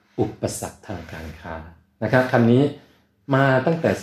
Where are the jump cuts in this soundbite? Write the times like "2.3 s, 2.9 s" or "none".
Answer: none